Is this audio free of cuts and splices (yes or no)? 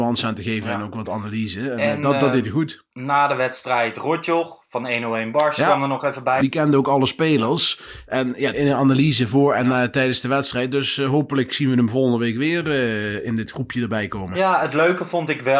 no